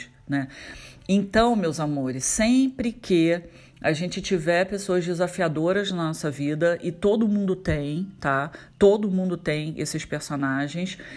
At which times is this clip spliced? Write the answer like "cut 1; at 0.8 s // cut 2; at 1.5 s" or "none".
none